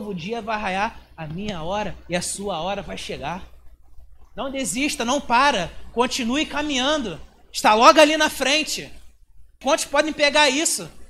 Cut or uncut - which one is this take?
cut